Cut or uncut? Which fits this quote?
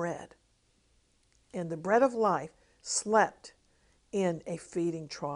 uncut